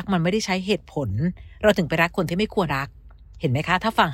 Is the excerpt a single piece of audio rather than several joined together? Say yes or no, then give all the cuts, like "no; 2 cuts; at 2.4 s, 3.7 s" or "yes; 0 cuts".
no; 1 cut; at 2.7 s